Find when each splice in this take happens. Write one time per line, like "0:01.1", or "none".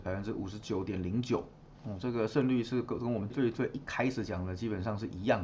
0:03.3